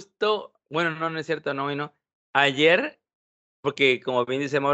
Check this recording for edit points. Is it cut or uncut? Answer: uncut